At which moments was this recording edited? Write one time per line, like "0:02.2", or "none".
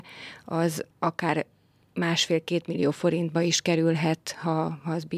0:00.9